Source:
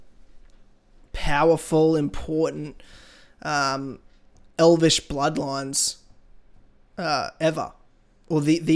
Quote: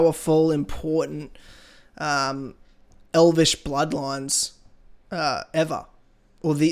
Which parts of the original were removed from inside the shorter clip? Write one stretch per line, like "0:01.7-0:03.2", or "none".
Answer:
0:06.5-0:06.9